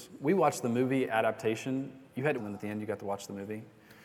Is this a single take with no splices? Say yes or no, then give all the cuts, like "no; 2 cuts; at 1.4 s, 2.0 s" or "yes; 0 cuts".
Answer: no; 1 cut; at 2.4 s